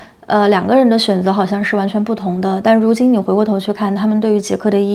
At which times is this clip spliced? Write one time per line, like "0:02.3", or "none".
none